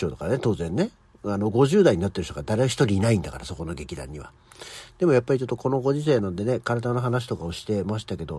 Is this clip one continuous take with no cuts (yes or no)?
yes